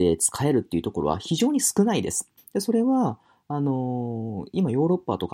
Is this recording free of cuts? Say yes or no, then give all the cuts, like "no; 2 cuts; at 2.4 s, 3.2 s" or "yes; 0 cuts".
no; 1 cut; at 2.4 s